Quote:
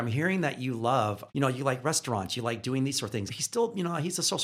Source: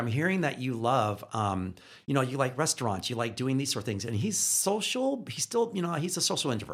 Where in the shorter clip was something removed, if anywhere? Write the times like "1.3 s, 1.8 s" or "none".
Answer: 1.3 s, 3.3 s